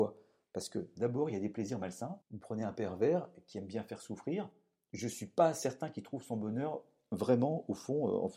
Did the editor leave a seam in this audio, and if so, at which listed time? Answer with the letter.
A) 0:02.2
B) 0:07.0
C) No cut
A